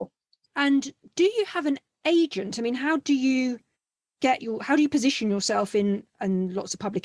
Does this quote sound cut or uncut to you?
uncut